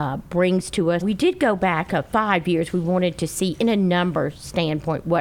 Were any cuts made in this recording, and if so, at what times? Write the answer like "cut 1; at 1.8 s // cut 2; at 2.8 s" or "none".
cut 1; at 1.0 s